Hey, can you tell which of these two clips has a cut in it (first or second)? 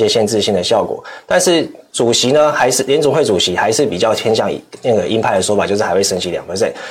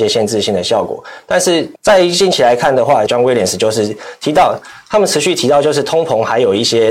second